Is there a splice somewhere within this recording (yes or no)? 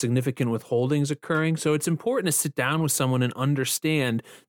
no